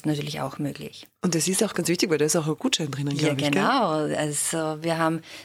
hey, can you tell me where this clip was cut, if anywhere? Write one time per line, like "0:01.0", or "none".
0:01.7